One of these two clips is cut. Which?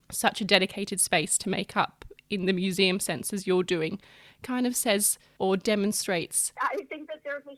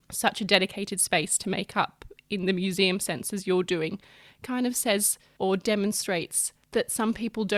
first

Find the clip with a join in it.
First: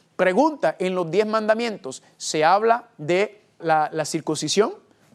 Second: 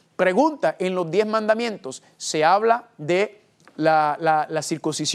first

